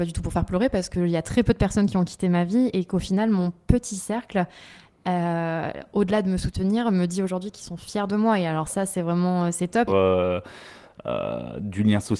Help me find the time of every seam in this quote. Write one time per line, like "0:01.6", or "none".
0:09.9